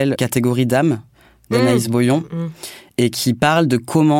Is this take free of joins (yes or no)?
yes